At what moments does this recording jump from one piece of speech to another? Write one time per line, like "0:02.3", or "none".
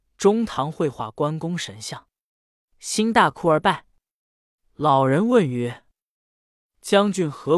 none